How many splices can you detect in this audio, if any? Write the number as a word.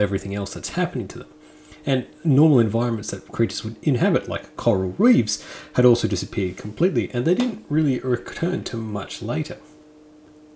zero